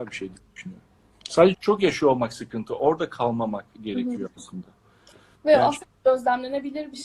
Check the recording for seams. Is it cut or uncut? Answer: cut